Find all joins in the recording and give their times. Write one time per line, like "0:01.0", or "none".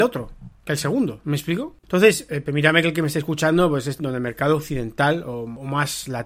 0:01.8
0:04.0